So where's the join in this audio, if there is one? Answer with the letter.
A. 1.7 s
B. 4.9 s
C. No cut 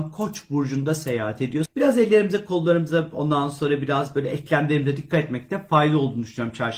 A